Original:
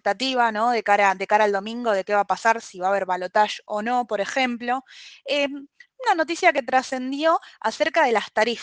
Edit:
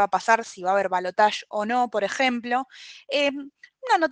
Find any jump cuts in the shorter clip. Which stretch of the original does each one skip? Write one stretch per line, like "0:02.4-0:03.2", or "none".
none